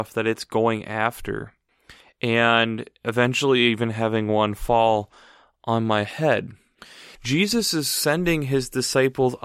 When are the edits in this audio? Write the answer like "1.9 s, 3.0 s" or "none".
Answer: 7.2 s